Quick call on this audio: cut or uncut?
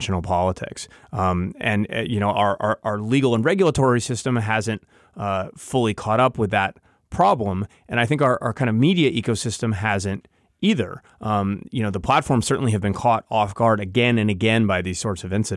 uncut